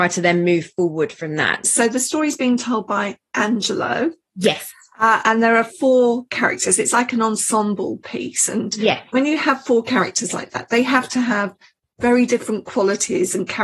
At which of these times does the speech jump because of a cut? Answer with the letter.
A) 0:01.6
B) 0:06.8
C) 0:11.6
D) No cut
A